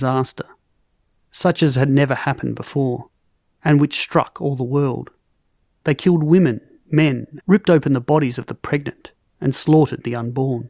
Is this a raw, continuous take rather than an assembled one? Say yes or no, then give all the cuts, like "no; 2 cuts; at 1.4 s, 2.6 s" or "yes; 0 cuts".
no; 1 cut; at 7.4 s